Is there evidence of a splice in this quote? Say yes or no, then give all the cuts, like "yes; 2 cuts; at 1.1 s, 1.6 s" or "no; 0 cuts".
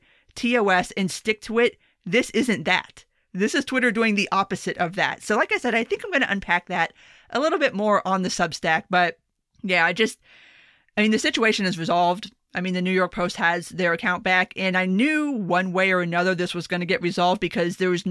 no; 0 cuts